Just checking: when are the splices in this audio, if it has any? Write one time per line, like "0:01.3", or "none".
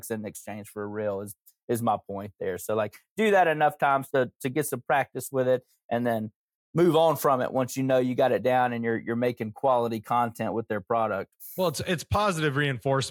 none